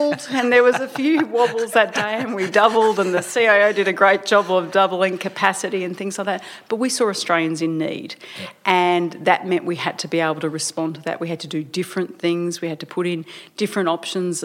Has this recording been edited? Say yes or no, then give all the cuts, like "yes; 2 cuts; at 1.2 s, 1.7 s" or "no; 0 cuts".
no; 0 cuts